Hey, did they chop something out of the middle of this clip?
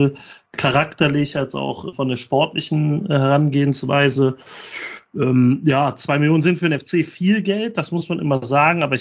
yes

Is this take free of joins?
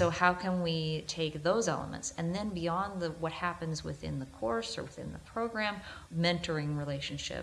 no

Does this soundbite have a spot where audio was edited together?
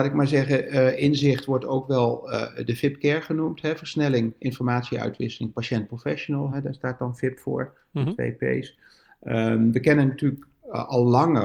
no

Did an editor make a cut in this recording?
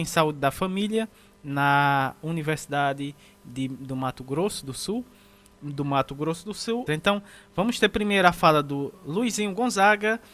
yes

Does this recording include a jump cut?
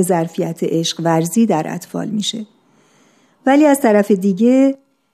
no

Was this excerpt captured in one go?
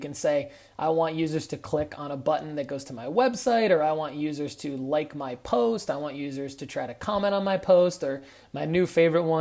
yes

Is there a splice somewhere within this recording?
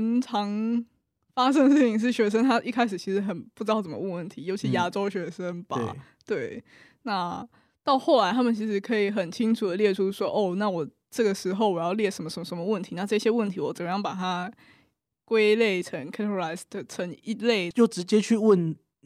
yes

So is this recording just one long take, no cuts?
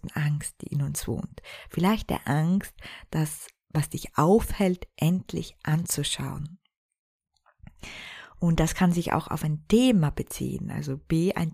yes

